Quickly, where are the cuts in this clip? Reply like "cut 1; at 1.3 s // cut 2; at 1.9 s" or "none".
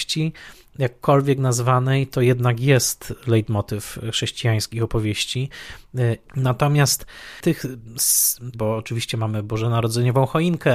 cut 1; at 6.2 s // cut 2; at 8.5 s